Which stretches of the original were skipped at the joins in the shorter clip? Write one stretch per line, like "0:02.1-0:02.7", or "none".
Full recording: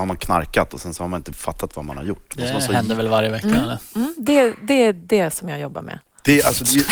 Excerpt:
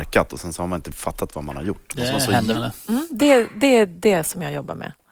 0:03.0-0:03.6